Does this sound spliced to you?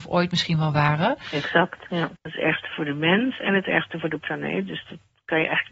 yes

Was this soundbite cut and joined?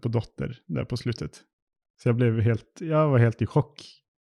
yes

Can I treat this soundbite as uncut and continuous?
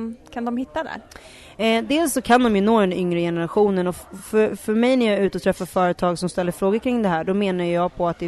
yes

